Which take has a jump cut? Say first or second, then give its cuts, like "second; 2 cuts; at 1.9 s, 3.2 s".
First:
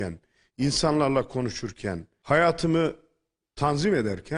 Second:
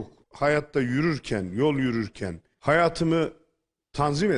second; 1 cut; at 2.5 s